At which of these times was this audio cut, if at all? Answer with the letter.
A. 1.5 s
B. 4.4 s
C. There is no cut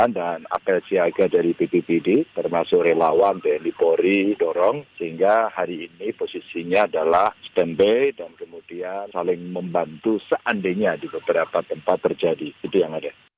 B